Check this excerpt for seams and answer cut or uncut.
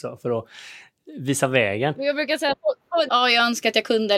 cut